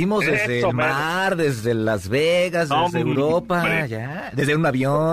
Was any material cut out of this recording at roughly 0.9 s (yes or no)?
no